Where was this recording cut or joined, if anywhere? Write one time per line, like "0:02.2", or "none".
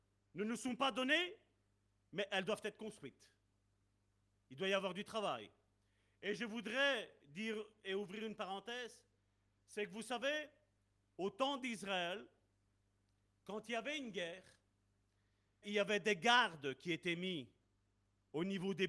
0:15.6